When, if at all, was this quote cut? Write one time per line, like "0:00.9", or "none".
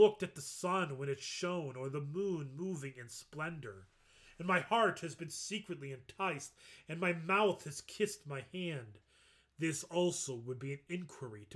none